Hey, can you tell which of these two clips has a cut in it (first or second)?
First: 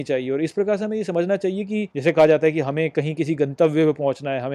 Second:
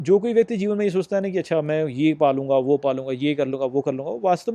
first